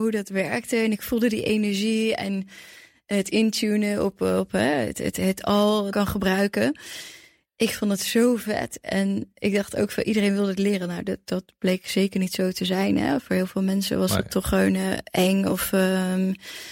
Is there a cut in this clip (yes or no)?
yes